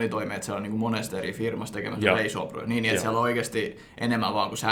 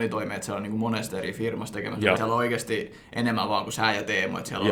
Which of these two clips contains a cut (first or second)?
second